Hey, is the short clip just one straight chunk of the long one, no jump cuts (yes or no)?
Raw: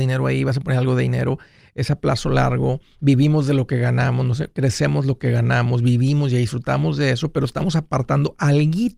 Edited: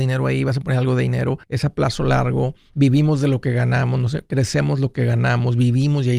no